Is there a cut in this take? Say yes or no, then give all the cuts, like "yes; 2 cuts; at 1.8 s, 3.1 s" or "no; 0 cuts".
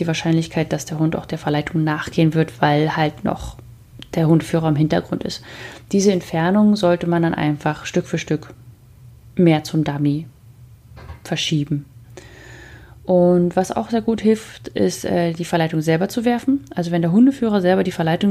no; 0 cuts